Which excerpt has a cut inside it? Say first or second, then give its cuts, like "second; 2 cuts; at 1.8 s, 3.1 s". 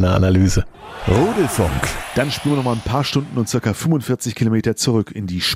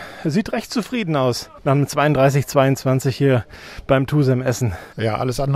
second; 1 cut; at 1.6 s